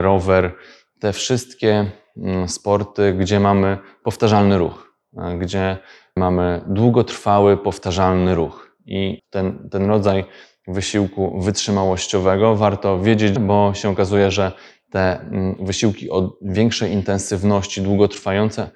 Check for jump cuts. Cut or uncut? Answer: cut